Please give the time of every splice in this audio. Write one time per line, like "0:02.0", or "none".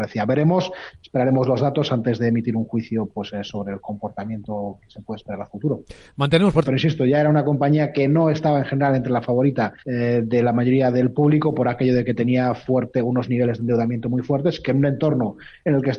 0:06.6
0:09.8

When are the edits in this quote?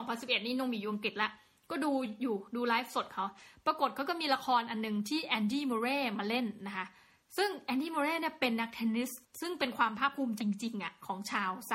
0:10.4

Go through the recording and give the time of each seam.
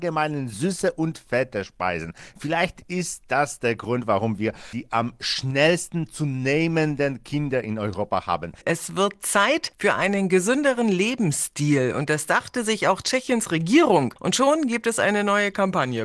none

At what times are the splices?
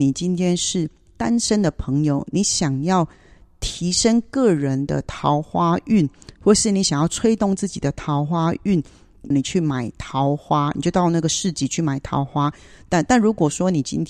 0:09.3
0:12.9

